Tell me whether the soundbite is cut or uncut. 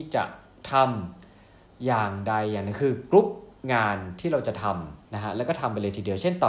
cut